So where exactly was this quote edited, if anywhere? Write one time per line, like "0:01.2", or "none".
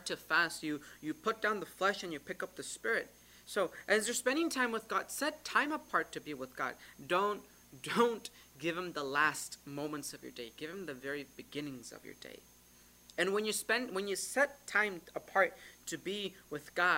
none

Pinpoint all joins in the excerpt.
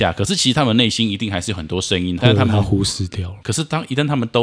0:02.2
0:03.4

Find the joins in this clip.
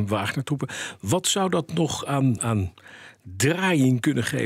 0:02.4

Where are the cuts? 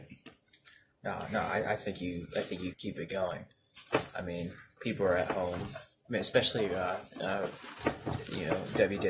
0:02.7

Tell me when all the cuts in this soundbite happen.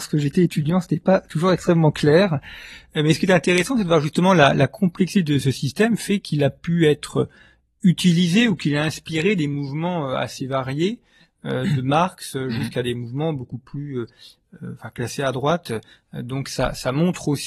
none

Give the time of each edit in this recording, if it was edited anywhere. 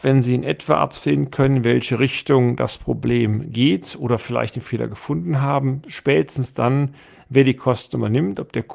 none

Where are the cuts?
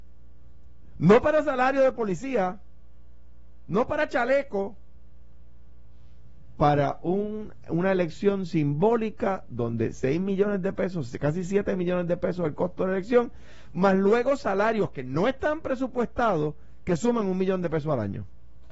none

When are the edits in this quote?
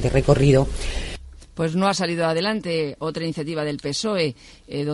none

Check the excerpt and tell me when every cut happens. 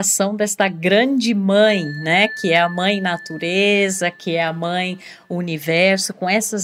none

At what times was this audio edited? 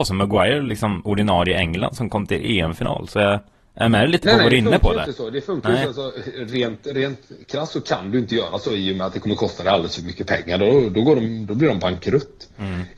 none

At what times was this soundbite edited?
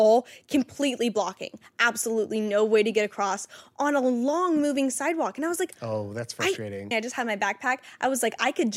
0:06.9

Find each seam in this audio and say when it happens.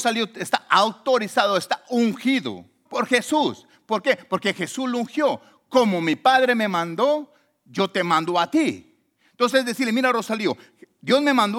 0:02.9

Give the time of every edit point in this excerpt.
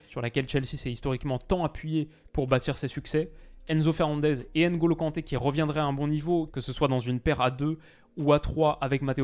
none

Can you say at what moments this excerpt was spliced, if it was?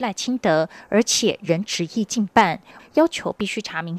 0:02.8

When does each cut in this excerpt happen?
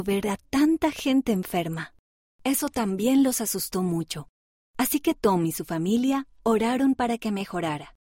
0:02.3

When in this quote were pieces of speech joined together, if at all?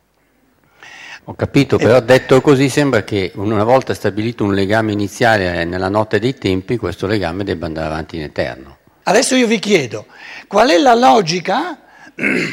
0:01.2
0:09.0

